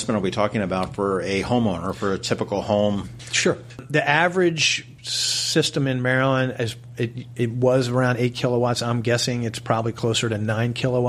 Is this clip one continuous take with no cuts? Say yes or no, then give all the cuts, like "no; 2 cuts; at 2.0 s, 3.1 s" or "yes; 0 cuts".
no; 1 cut; at 5.0 s